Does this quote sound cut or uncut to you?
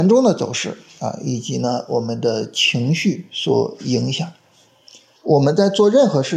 cut